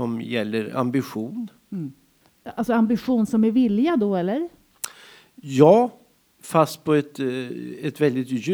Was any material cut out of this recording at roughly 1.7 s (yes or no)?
no